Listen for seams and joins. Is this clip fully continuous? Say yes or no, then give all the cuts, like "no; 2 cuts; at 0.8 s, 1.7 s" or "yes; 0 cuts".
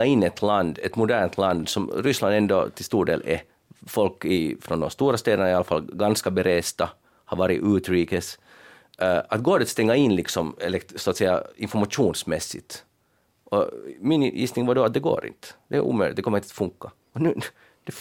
yes; 0 cuts